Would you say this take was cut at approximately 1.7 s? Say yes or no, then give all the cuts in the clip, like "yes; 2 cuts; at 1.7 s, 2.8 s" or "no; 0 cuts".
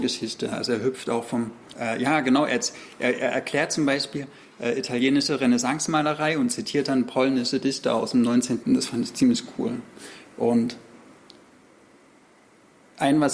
yes; 2 cuts; at 1.7 s, 8.6 s